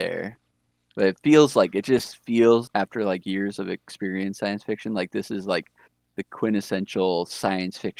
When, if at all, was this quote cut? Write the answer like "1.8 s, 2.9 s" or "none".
2.7 s